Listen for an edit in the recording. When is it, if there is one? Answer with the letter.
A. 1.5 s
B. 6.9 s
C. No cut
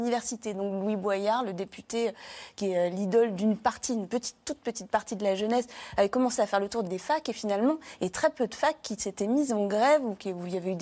B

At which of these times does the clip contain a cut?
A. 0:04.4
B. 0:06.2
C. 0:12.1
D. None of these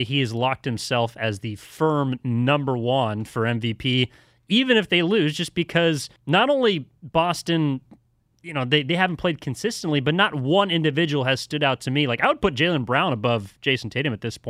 B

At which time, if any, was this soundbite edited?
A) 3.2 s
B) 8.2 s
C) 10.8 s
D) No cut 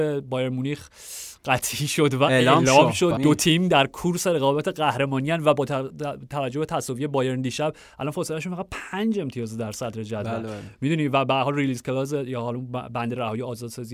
A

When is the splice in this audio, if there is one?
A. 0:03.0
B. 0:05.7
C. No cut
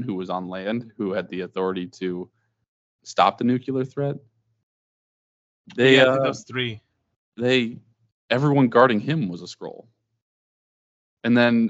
A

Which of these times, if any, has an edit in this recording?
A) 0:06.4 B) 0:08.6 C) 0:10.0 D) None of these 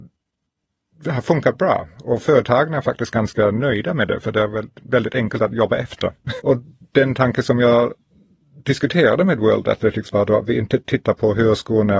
A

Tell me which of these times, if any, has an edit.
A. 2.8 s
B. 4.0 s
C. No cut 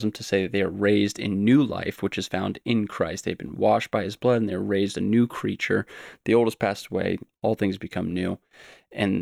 C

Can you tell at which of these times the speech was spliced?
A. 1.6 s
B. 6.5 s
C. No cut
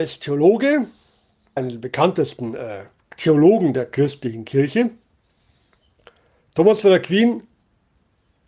A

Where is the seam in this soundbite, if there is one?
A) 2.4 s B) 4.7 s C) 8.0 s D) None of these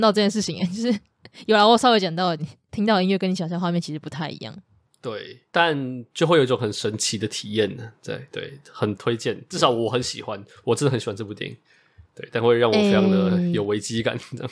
A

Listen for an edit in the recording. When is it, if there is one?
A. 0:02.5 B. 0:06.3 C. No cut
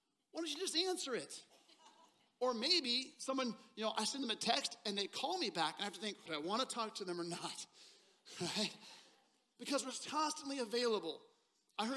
B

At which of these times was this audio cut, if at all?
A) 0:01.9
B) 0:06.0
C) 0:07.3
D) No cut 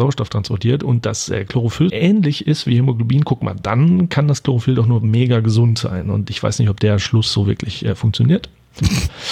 A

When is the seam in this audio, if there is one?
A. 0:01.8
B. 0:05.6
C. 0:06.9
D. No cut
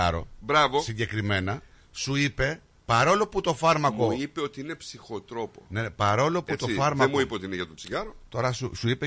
D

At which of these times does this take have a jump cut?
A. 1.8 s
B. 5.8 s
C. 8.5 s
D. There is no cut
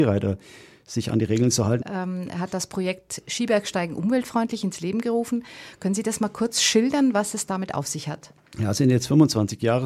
A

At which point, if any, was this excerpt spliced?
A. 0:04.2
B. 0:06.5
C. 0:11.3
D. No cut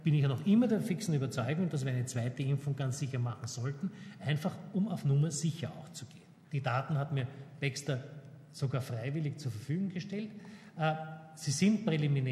B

